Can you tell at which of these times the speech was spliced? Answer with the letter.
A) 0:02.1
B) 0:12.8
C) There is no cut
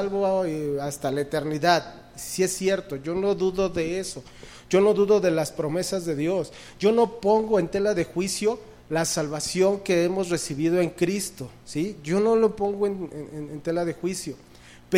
C